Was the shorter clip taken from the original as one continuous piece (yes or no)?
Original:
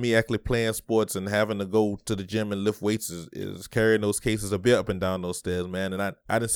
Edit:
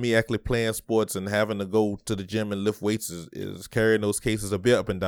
yes